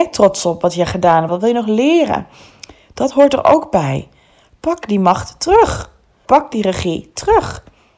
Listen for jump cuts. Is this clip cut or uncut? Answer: cut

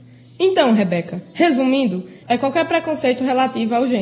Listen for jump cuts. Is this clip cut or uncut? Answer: cut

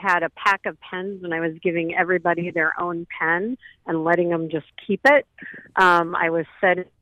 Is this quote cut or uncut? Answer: uncut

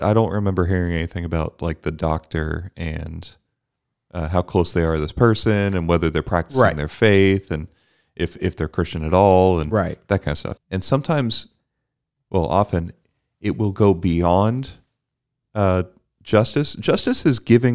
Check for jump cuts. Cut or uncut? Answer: cut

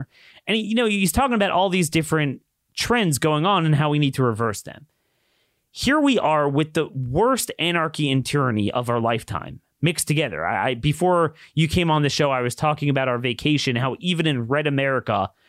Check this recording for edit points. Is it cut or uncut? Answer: uncut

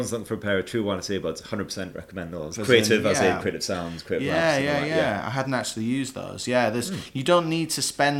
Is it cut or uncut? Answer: cut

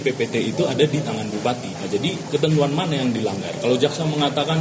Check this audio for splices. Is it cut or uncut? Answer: uncut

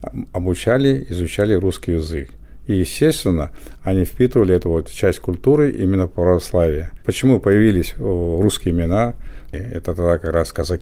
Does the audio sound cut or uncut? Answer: cut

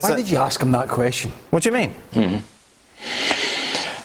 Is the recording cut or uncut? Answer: cut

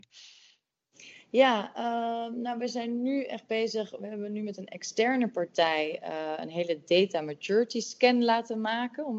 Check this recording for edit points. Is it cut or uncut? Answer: uncut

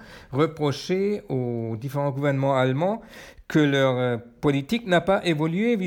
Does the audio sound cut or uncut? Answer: uncut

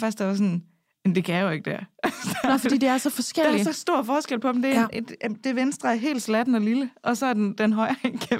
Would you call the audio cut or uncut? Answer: uncut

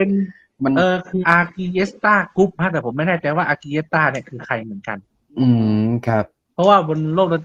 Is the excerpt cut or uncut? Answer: cut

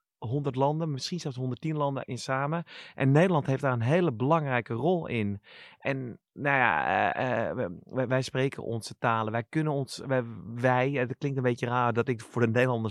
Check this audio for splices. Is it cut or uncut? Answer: cut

